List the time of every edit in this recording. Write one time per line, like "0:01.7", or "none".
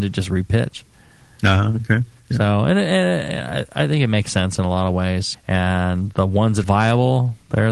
0:05.3
0:06.6